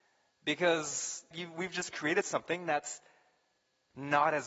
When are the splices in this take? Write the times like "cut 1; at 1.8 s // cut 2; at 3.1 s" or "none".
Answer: cut 1; at 1.3 s